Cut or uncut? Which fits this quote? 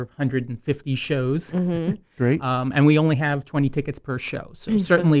uncut